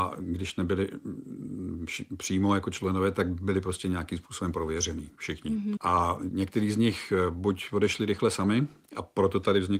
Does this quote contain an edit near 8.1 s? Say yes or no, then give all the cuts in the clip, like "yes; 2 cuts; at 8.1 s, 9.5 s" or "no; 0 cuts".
no; 1 cut; at 5.8 s